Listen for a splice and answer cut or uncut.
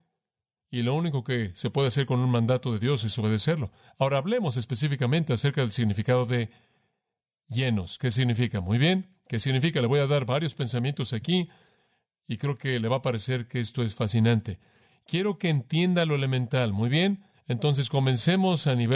uncut